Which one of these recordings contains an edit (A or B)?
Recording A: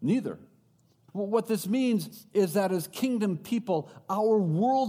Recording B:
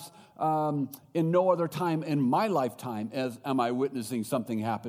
A